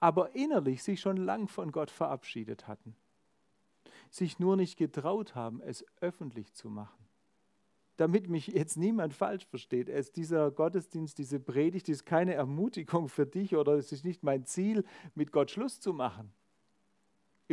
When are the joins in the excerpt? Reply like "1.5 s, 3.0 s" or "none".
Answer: 7.9 s

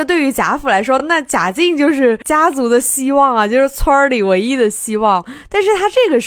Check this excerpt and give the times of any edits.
none

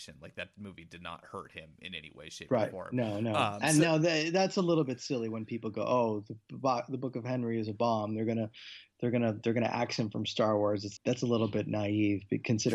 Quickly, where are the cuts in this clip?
11.0 s

